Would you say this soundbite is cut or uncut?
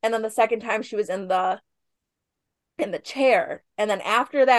uncut